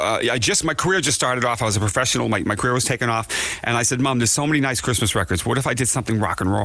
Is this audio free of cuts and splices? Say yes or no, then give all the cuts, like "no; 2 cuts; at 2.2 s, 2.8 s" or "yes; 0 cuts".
yes; 0 cuts